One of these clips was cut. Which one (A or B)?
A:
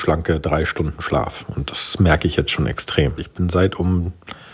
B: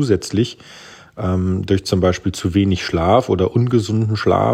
A